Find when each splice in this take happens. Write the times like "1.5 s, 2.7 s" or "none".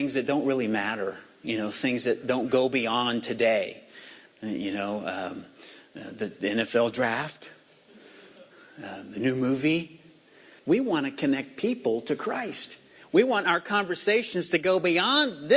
4.3 s, 10.6 s